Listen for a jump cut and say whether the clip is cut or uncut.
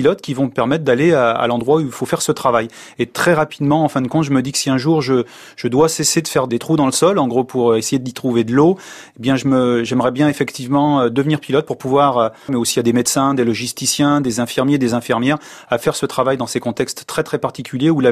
cut